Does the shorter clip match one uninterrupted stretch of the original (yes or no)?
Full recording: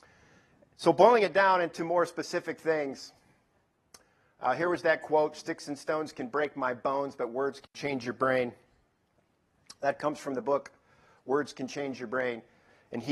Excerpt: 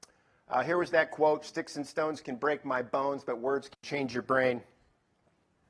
yes